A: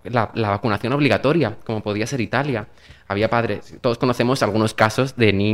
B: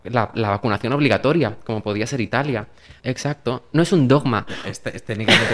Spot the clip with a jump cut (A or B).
B